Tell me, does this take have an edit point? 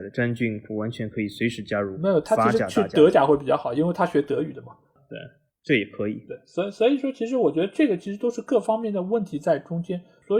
no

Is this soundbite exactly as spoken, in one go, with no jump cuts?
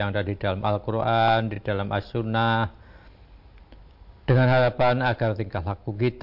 yes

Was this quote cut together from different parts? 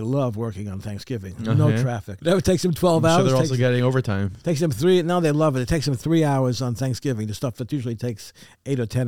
yes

